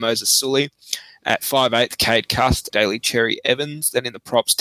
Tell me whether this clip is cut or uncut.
cut